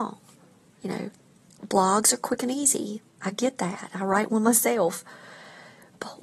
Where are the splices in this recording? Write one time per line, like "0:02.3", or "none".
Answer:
none